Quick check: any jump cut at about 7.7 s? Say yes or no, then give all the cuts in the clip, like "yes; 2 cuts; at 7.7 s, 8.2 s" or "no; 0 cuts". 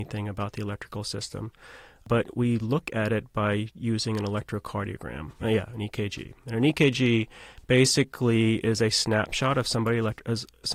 no; 1 cut; at 5.4 s